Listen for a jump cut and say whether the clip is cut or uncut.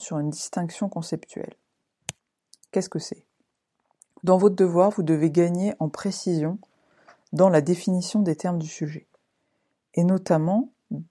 uncut